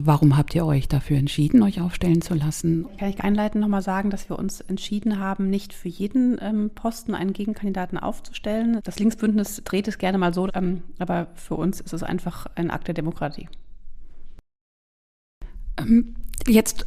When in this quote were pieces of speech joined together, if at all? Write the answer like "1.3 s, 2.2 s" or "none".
2.8 s, 8.8 s, 10.5 s